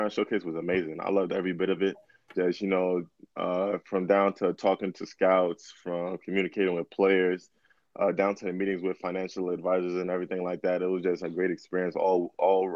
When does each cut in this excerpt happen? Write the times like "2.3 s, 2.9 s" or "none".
none